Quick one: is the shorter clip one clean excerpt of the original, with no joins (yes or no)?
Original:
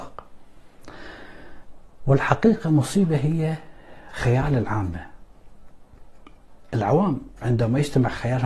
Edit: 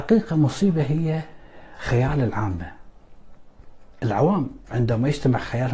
no